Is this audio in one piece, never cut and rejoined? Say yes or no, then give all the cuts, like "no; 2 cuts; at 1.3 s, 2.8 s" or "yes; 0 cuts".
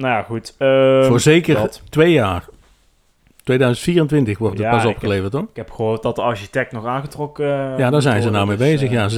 yes; 0 cuts